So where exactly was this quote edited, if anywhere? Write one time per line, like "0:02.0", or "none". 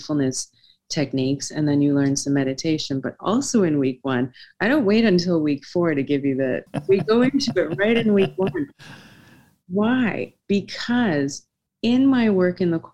0:06.7